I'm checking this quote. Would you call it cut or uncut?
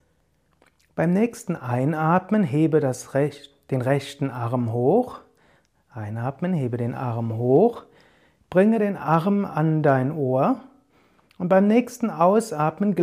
uncut